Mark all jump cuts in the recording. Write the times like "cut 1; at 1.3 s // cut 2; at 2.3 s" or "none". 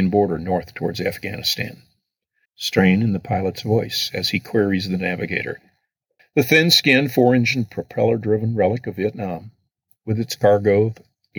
cut 1; at 2.5 s // cut 2; at 6.2 s